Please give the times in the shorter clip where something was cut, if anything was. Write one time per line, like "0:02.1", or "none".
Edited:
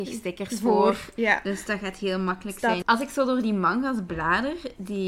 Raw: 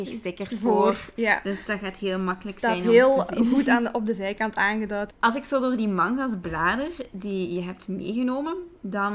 0:02.8